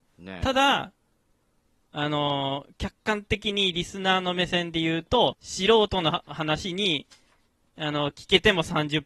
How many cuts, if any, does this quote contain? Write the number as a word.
one